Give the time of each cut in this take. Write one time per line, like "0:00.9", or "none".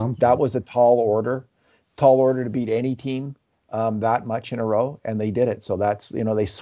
none